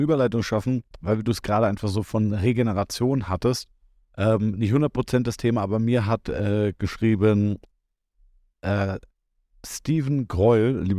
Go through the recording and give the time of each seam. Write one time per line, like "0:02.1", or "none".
none